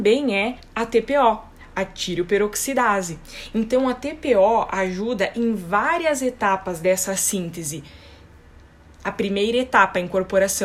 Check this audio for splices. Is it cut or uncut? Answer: uncut